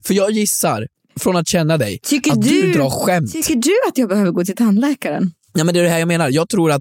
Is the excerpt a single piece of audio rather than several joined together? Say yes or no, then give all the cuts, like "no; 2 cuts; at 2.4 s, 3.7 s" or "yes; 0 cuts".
yes; 0 cuts